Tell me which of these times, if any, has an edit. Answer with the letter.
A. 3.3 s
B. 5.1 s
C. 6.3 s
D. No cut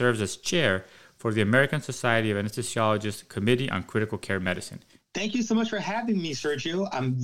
B